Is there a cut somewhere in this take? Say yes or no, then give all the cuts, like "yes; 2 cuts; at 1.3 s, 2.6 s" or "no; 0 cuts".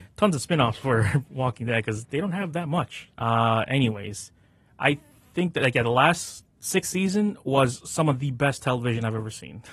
yes; 2 cuts; at 3.1 s, 6.5 s